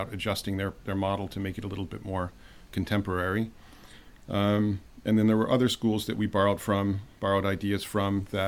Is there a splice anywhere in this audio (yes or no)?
no